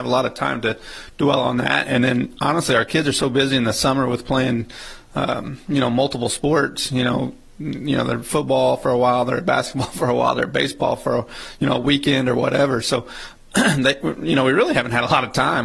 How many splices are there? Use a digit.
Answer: 0